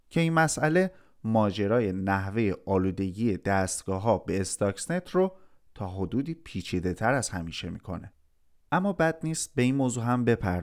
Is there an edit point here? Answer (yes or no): yes